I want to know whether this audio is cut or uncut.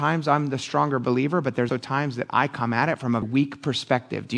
cut